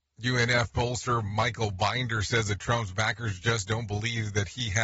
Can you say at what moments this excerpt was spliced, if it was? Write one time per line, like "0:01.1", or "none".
none